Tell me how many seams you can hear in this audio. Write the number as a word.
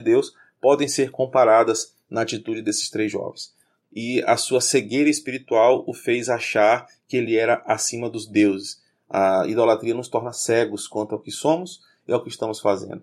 one